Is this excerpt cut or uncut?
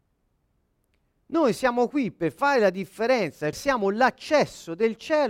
cut